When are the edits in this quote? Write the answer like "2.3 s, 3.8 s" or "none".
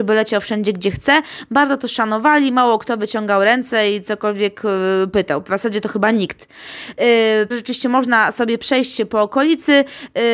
7.5 s